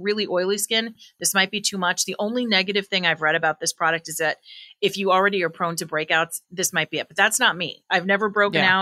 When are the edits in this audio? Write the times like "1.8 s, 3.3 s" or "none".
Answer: none